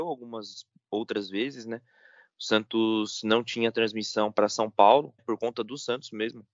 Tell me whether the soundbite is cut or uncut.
cut